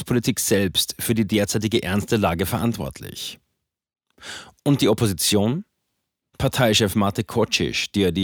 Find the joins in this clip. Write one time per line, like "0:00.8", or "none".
0:06.2